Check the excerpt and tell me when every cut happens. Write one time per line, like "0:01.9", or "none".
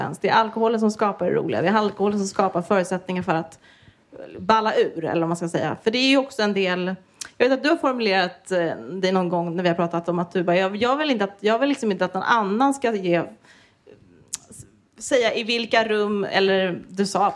none